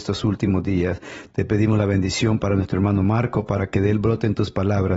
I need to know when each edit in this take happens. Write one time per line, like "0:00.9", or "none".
none